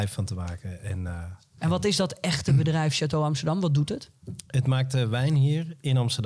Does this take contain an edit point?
no; 0 cuts

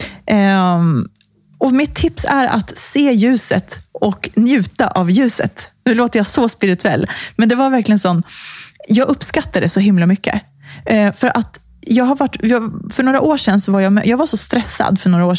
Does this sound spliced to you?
no; 0 cuts

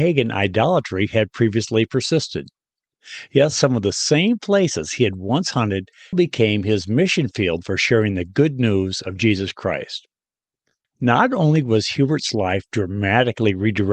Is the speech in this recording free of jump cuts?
no; 2 cuts; at 6.1 s, 10.8 s

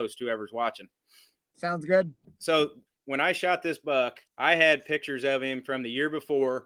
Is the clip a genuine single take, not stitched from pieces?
no; 2 cuts; at 2.2 s, 4.3 s

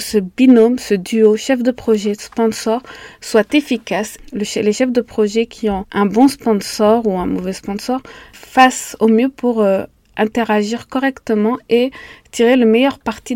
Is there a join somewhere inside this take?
no; 0 cuts

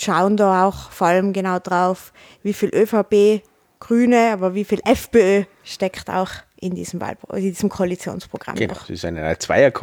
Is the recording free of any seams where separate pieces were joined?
yes; 0 cuts

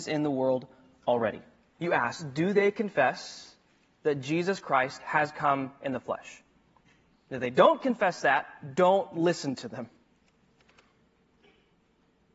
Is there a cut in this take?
yes; 1 cut; at 1.7 s

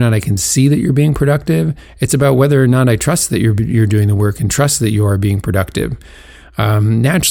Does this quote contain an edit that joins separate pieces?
no; 0 cuts

